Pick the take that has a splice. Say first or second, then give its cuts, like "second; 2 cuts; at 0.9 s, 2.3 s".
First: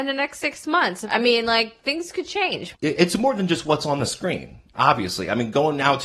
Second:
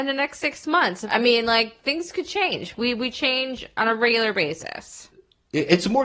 first; 1 cut; at 2.8 s